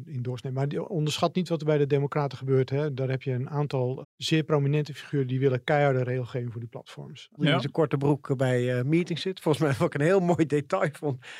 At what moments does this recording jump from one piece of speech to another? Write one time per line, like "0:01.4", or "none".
0:04.0
0:07.4